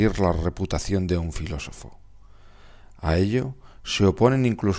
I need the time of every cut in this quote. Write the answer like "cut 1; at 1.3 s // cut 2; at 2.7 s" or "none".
none